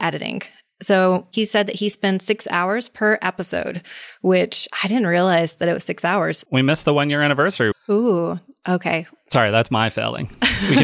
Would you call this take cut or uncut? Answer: cut